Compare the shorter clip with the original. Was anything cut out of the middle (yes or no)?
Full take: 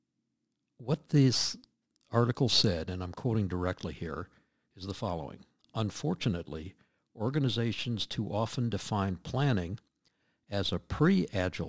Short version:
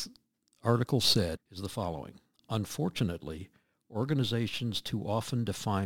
yes